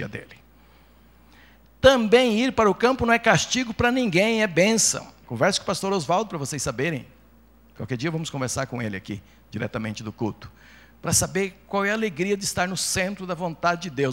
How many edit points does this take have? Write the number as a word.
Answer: one